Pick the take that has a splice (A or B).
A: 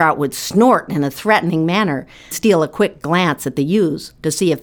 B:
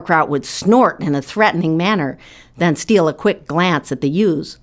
A